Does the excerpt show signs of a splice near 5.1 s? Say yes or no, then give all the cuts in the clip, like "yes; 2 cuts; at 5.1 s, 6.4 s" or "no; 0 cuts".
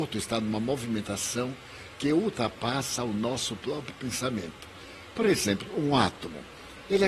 no; 0 cuts